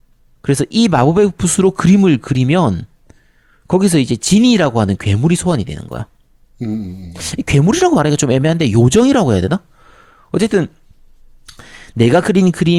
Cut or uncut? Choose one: uncut